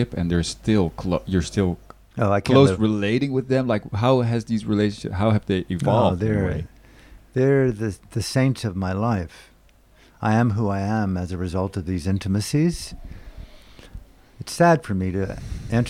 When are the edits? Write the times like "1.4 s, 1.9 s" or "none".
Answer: none